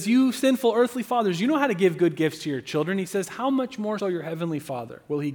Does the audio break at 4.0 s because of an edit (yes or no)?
yes